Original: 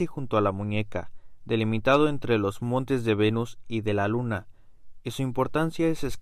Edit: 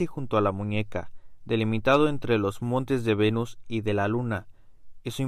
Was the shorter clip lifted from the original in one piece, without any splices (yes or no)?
yes